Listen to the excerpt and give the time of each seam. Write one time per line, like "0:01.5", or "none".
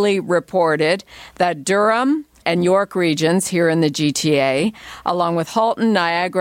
0:02.4